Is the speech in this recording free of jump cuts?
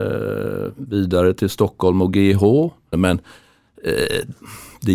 no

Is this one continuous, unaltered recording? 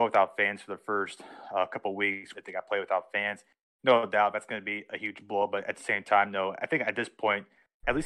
no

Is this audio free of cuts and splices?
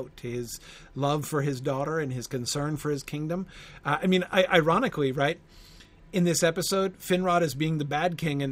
yes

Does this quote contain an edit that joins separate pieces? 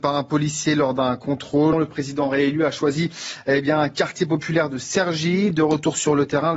yes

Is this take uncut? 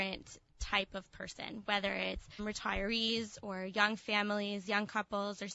no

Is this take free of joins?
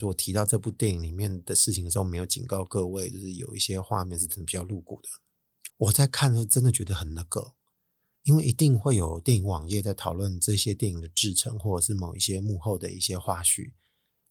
no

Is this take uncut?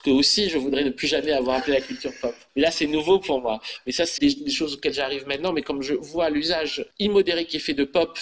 no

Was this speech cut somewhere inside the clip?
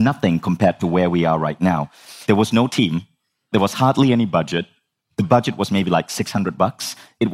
yes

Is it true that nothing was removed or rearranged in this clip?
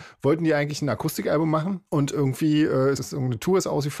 no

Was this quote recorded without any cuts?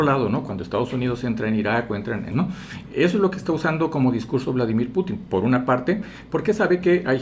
no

